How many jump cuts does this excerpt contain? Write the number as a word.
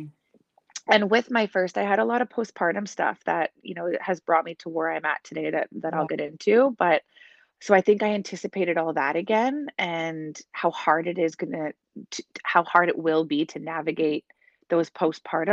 zero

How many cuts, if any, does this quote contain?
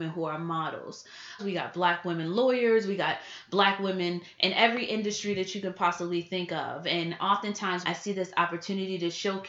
two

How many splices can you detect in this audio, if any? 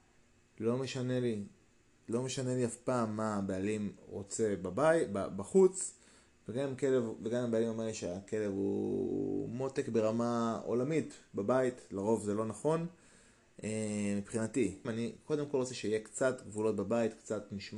one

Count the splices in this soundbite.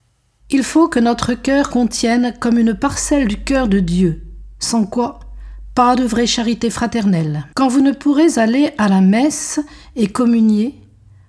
one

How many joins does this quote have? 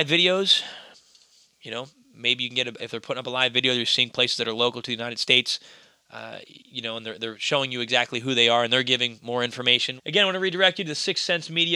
two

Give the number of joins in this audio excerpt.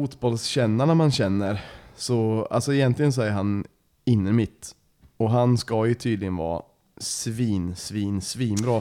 zero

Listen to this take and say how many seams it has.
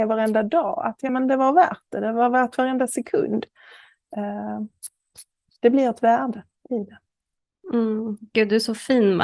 zero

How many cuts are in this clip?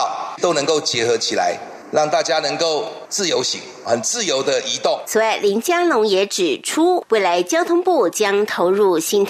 one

